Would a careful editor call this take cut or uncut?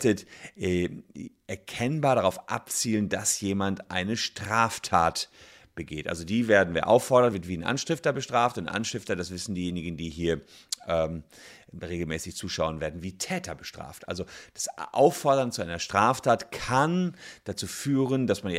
uncut